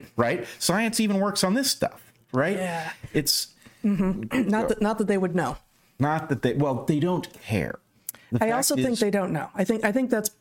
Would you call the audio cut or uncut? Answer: uncut